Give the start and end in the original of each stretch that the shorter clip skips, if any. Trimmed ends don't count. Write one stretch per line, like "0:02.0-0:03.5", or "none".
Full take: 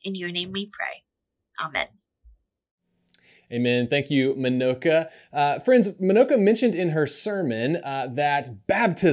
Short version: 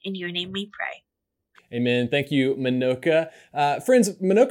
0:01.5-0:03.3